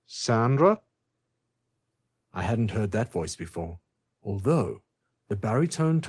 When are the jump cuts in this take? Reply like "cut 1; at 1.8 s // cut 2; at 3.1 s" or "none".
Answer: cut 1; at 4.1 s

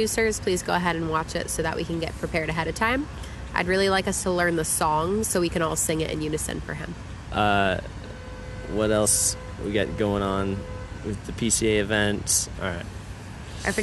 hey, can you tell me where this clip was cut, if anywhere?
cut 1; at 7.2 s // cut 2; at 9.6 s // cut 3; at 12.5 s

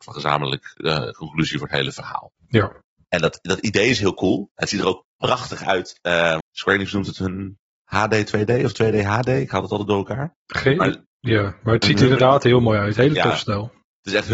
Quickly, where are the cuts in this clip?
cut 1; at 6.4 s

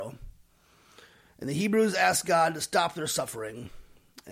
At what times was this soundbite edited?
none

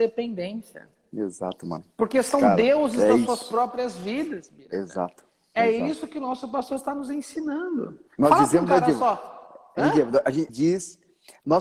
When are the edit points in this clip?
cut 1; at 8.1 s // cut 2; at 10.5 s

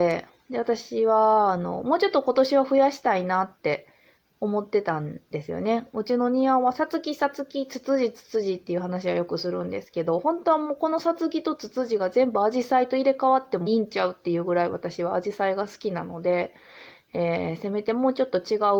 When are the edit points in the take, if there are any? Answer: cut 1; at 13.7 s

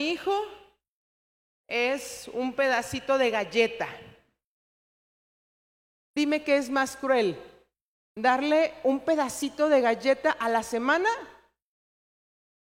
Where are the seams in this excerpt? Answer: none

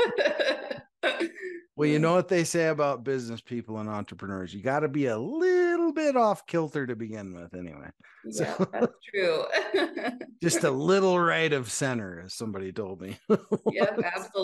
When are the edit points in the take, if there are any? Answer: none

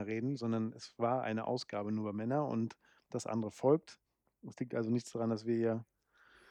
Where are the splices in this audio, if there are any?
none

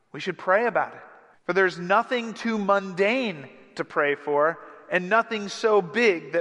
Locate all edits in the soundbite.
cut 1; at 1.3 s

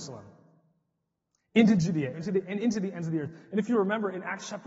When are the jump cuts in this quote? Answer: cut 1; at 2.1 s

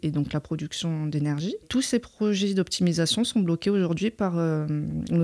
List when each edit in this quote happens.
none

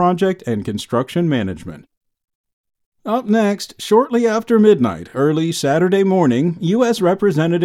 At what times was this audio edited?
none

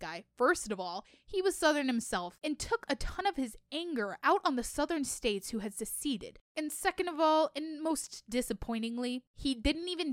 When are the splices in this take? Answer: cut 1; at 6.5 s

